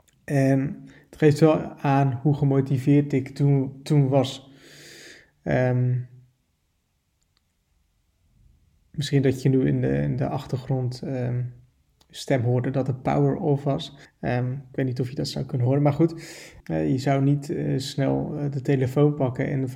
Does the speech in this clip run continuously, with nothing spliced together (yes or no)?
no